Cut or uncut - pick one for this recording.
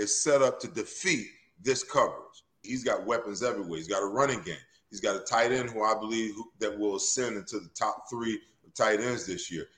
cut